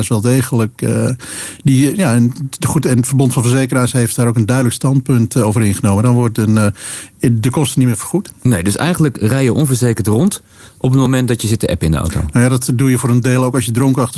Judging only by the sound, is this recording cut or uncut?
uncut